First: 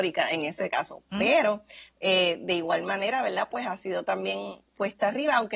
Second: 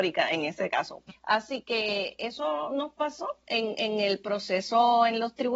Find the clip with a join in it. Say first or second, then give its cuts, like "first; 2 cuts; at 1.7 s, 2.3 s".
second; 1 cut; at 1.1 s